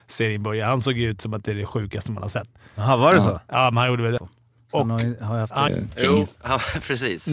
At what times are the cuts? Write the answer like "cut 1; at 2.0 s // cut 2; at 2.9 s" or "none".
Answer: cut 1; at 4.2 s // cut 2; at 5.7 s